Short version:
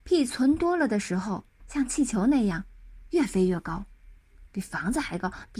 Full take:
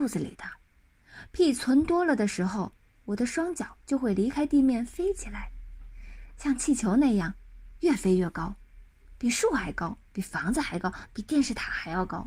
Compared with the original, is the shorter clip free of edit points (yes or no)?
no